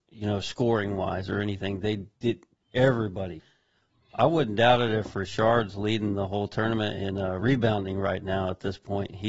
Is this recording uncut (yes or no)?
no